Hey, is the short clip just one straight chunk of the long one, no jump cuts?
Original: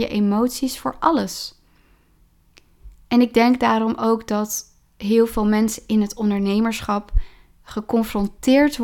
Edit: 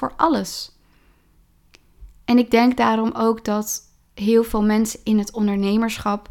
yes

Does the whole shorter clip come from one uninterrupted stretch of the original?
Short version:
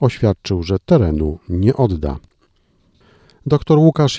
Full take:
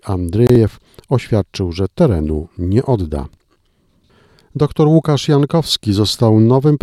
yes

